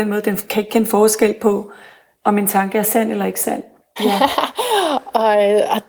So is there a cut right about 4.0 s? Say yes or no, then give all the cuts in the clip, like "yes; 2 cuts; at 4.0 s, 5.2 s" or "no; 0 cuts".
yes; 1 cut; at 4.0 s